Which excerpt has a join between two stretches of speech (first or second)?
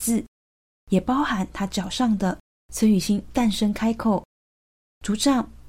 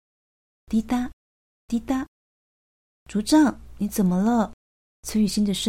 first